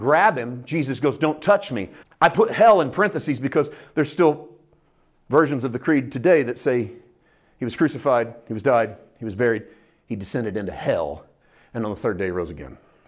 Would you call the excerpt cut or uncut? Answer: cut